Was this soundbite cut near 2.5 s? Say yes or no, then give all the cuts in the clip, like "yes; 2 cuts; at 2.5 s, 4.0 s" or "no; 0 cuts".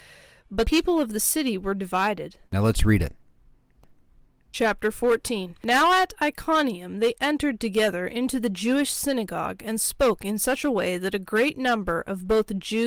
yes; 2 cuts; at 2.5 s, 5.6 s